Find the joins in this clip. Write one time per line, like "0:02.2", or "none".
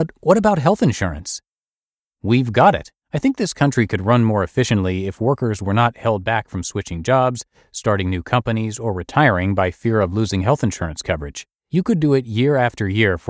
0:03.0
0:11.6